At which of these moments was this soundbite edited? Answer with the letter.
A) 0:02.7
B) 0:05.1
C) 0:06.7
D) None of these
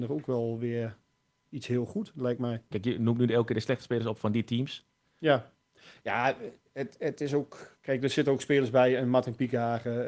A